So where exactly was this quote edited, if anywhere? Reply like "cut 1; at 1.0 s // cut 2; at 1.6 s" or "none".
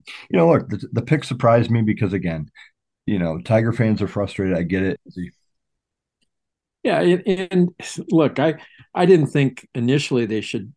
cut 1; at 5.0 s